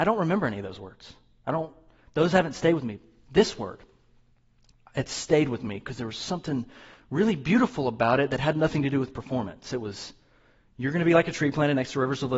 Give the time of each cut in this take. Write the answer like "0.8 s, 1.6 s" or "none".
none